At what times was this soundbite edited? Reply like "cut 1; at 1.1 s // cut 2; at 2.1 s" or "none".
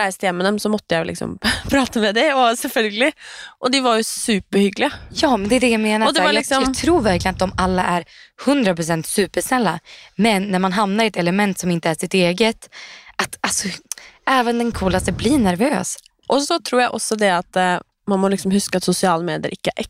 cut 1; at 14.7 s // cut 2; at 16.2 s

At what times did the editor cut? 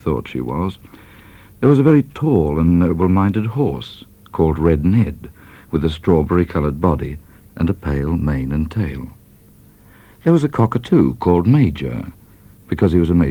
none

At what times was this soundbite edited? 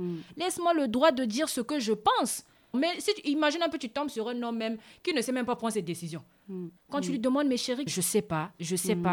cut 1; at 2.7 s // cut 2; at 6.8 s // cut 3; at 7.9 s

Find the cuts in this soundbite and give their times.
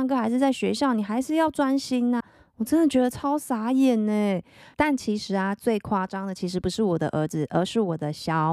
cut 1; at 2.2 s // cut 2; at 4.7 s

